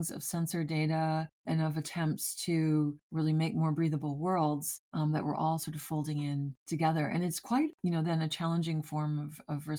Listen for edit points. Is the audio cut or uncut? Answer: uncut